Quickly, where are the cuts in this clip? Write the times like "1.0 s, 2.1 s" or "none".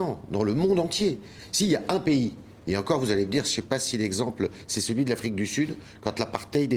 none